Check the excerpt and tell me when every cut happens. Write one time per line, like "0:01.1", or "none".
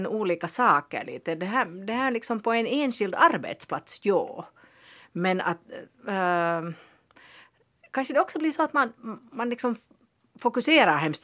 none